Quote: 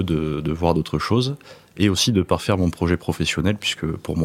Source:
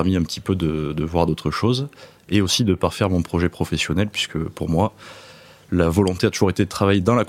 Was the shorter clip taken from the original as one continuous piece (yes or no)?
yes